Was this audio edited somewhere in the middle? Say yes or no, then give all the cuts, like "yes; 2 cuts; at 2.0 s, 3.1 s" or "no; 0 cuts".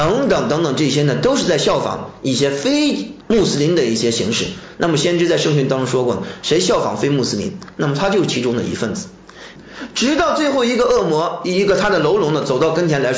yes; 1 cut; at 9.6 s